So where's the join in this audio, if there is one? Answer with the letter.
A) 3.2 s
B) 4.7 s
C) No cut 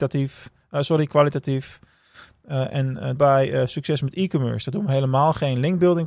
A